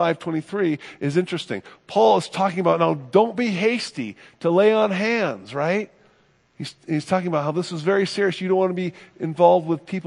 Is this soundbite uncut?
yes; 0 cuts

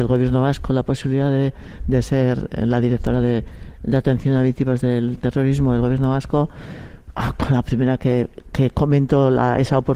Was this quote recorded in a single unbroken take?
no; 1 cut; at 8.4 s

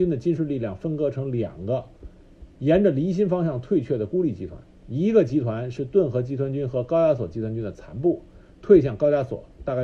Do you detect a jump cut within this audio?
no; 0 cuts

